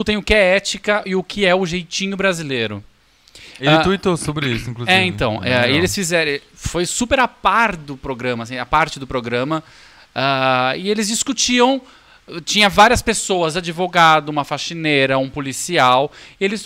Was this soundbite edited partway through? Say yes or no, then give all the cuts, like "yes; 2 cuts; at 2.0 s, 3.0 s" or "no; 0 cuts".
no; 0 cuts